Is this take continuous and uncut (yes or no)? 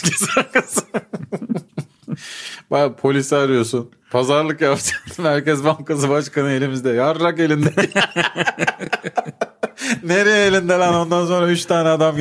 yes